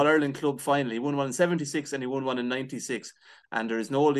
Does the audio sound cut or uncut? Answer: uncut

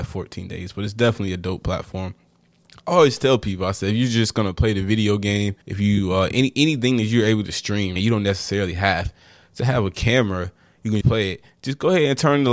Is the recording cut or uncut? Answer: cut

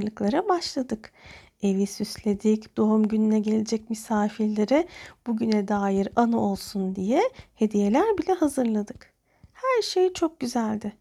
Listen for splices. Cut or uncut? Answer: cut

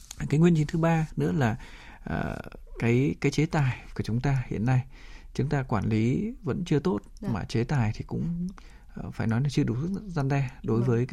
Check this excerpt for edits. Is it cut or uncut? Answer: uncut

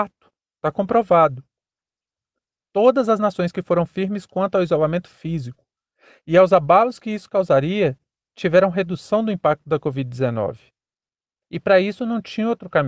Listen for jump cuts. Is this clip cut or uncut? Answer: cut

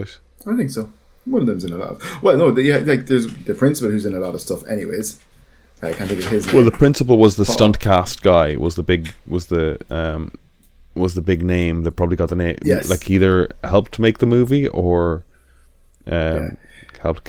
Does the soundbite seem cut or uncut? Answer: cut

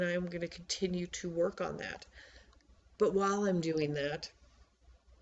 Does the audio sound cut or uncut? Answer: uncut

